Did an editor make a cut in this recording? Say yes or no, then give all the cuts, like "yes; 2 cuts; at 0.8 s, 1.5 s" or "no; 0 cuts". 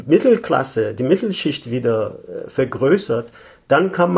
no; 0 cuts